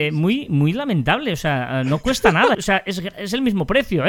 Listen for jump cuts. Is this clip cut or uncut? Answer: cut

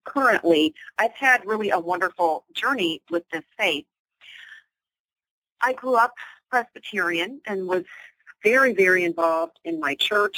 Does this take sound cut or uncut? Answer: cut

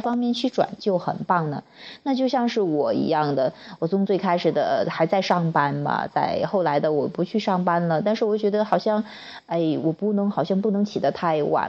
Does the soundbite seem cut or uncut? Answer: uncut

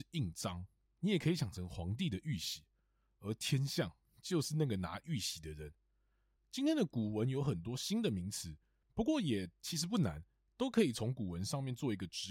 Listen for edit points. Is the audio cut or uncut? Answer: cut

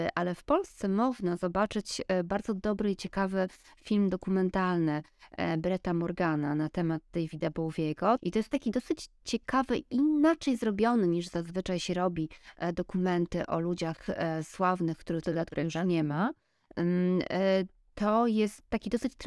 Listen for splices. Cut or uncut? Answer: cut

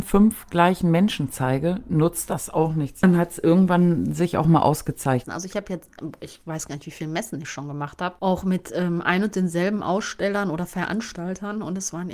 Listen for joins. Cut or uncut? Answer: cut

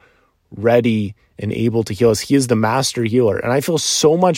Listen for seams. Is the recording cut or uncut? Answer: uncut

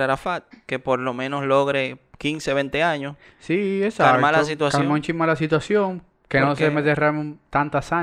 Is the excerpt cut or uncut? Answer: uncut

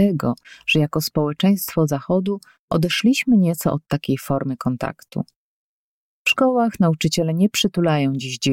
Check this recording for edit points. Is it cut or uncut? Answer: uncut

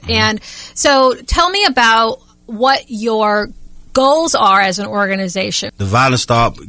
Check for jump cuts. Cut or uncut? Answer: cut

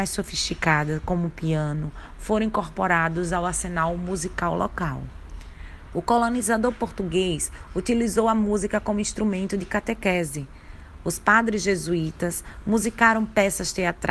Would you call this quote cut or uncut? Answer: cut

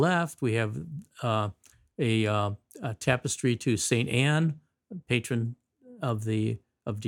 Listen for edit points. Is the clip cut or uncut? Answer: uncut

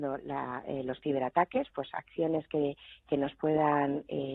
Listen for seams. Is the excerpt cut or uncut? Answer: cut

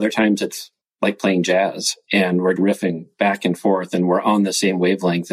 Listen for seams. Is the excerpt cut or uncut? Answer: cut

